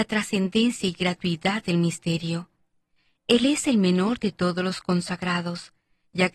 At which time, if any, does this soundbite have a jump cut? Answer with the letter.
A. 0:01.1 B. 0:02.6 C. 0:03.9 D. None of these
D